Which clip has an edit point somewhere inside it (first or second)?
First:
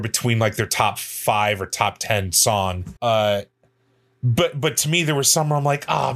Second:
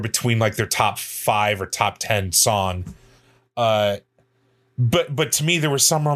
first